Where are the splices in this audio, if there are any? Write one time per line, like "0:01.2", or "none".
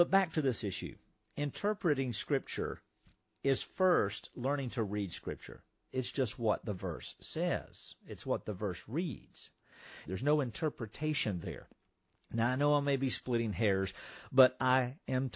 0:05.9
0:10.1